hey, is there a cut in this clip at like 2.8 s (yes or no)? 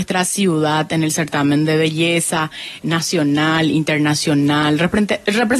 yes